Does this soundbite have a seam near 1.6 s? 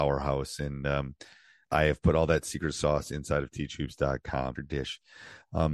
yes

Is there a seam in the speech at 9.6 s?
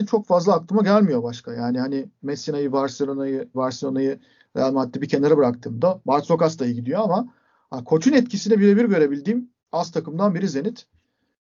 yes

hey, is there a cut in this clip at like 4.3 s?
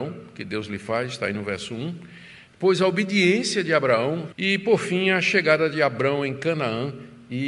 yes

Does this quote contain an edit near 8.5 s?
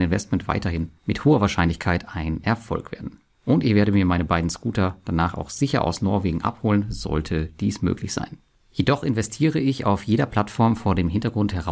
no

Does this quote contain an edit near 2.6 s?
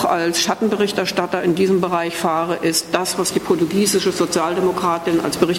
no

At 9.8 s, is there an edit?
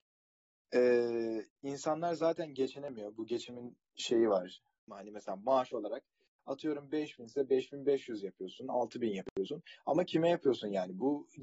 no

